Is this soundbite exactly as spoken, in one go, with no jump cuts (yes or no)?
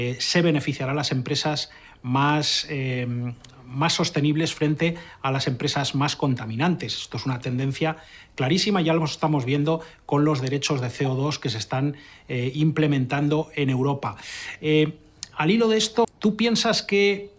no